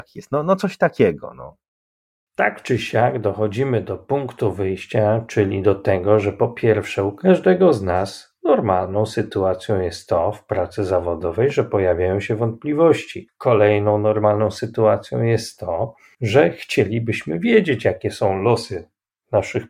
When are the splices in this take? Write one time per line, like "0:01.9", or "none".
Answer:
0:02.3